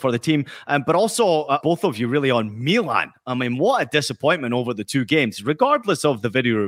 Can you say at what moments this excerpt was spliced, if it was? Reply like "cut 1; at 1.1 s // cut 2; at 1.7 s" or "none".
cut 1; at 1.6 s